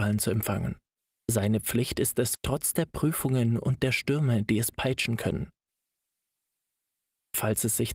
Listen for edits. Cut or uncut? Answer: cut